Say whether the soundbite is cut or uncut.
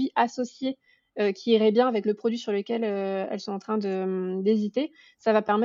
uncut